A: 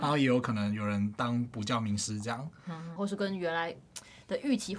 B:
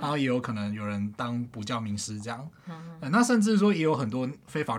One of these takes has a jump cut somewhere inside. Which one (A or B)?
A